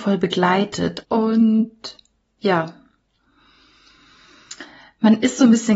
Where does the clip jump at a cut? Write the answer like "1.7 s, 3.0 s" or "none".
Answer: 1.0 s